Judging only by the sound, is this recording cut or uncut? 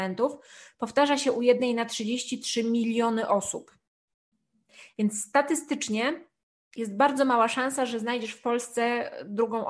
uncut